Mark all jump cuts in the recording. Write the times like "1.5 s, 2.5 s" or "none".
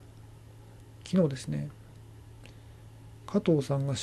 none